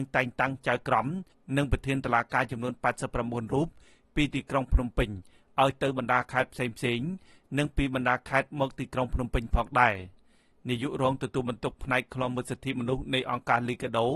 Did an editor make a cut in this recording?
no; 0 cuts

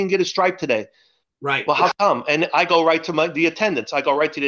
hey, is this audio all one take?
no; 1 cut; at 1.3 s

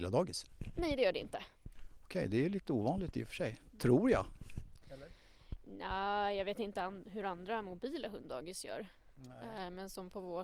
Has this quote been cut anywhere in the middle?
no; 0 cuts

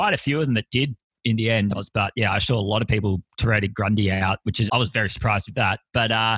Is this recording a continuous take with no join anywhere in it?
no; 2 cuts; at 1.7 s, 4.7 s

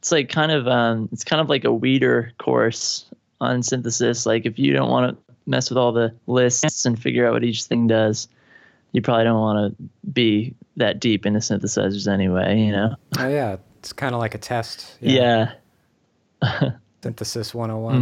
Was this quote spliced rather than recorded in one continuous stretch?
yes; 1 cut; at 17.0 s

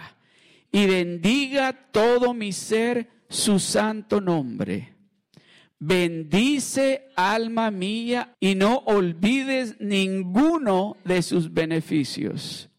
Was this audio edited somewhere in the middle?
yes; 1 cut; at 8.3 s

